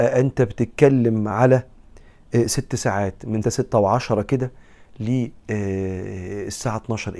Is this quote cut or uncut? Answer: cut